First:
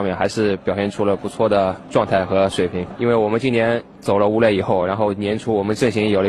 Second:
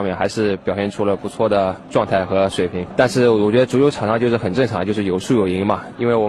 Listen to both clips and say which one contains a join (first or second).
first